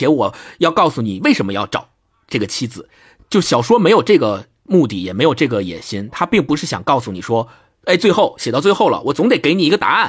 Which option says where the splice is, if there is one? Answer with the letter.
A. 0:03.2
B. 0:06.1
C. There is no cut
C